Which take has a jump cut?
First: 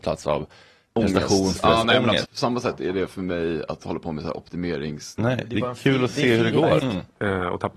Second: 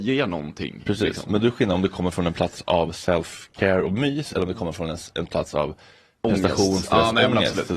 first; 3 cuts; at 2.2 s, 5.2 s, 6.8 s

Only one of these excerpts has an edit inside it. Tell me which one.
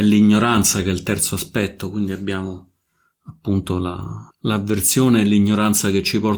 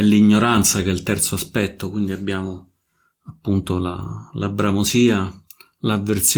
first; 1 cut; at 4.3 s

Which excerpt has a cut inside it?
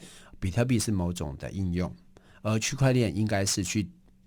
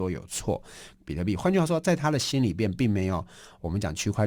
second; 1 cut; at 0.9 s

